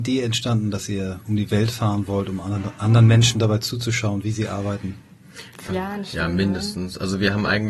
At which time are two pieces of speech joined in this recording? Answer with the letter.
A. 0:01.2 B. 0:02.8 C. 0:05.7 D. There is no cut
C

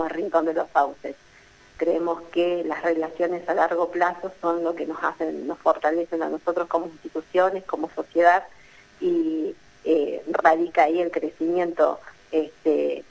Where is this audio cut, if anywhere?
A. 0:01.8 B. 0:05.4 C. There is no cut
A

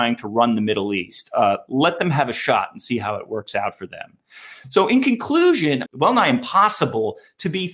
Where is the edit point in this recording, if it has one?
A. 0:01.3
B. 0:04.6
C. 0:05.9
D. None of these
C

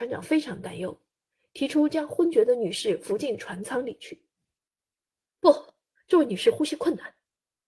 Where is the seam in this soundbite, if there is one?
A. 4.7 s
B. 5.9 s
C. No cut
B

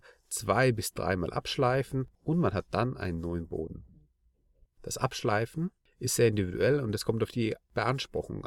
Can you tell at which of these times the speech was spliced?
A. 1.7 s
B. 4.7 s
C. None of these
C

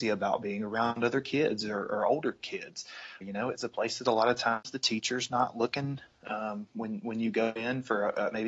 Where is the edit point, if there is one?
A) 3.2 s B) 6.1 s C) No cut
A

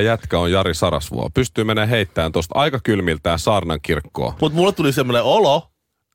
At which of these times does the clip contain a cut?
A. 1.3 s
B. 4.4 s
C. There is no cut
B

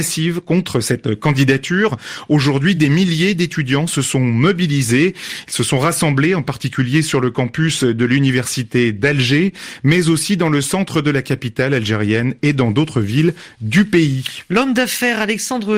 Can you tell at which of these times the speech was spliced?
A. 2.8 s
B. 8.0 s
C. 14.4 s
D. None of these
D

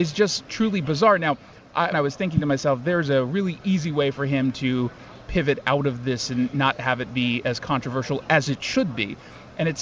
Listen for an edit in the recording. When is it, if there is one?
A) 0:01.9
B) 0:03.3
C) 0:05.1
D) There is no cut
A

